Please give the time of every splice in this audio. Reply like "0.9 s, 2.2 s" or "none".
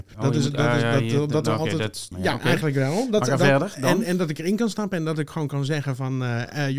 2.1 s